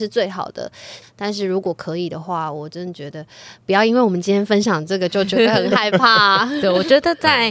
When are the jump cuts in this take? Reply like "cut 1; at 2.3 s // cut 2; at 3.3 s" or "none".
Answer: cut 1; at 1.0 s